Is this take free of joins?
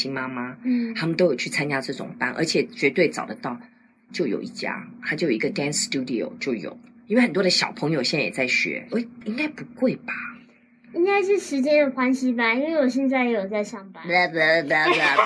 no; 2 cuts; at 4.1 s, 8.9 s

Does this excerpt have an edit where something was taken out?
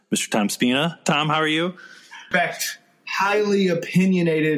yes; 1 cut; at 2.3 s

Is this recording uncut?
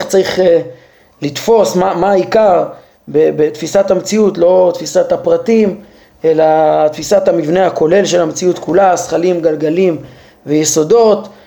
yes; 0 cuts

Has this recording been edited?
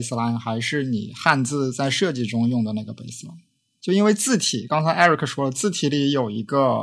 no; 0 cuts

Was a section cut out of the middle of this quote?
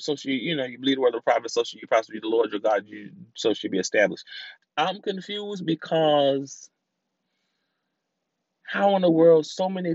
yes; 1 cut; at 4.6 s

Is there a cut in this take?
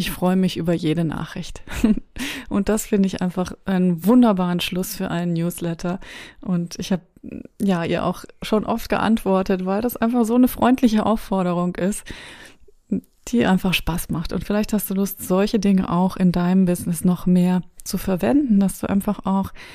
no; 0 cuts

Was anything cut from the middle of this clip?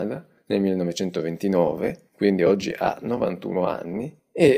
no; 0 cuts

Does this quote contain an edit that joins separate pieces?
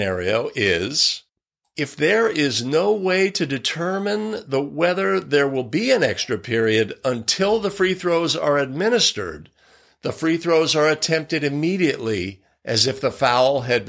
no; 0 cuts

